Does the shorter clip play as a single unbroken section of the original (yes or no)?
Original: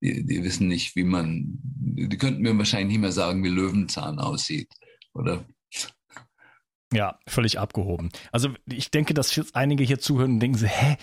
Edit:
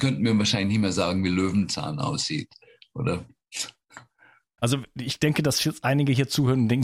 no